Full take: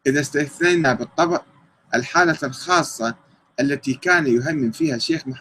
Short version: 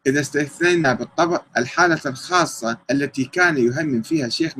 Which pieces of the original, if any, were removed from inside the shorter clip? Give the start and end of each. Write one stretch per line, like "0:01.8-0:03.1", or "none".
0:01.5-0:01.8
0:03.2-0:03.5